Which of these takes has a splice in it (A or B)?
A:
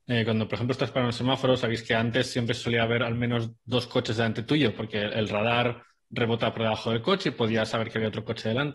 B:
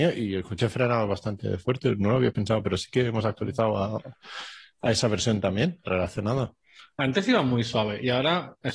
B